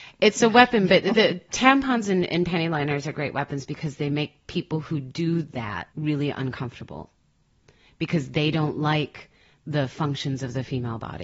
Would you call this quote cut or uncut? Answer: cut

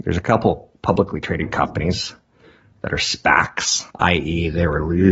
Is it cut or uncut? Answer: cut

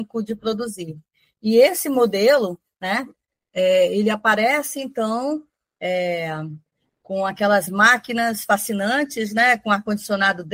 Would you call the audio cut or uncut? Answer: uncut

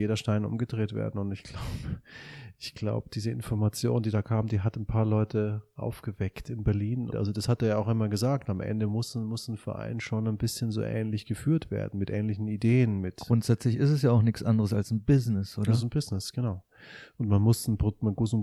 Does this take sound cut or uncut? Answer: cut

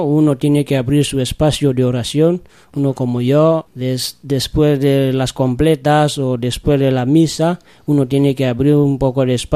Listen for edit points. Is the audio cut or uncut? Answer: cut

